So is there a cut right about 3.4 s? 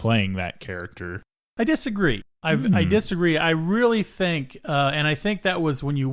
no; 0 cuts

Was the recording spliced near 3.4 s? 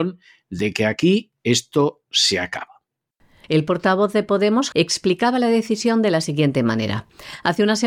yes; 2 cuts; at 3.4 s, 4.7 s

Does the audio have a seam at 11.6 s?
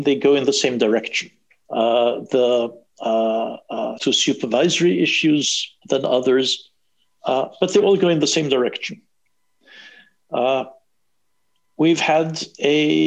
no; 3 cuts; at 1.7 s, 4.0 s, 5.8 s

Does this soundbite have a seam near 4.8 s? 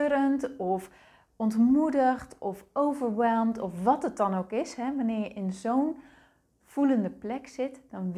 no; 0 cuts

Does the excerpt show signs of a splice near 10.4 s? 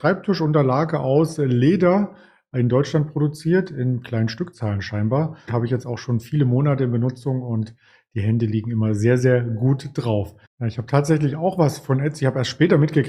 yes; 2 cuts; at 5.5 s, 10.4 s

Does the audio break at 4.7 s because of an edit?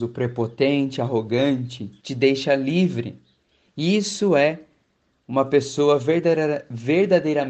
no; 1 cut; at 2.0 s

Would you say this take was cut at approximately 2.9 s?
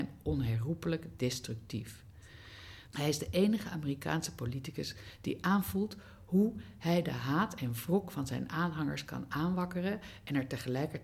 yes; 1 cut; at 2.9 s

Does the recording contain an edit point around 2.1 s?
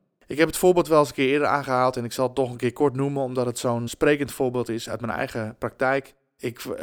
no; 1 cut; at 3.9 s

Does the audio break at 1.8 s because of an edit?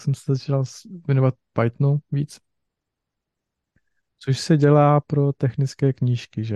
no; 1 cut; at 4.1 s

